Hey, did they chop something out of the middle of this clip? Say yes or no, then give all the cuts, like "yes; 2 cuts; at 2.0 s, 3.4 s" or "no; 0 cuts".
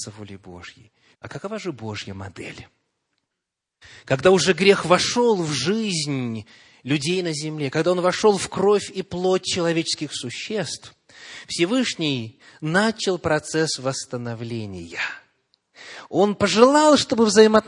yes; 1 cut; at 1.1 s